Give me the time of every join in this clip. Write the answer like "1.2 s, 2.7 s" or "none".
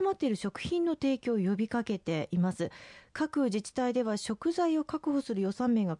none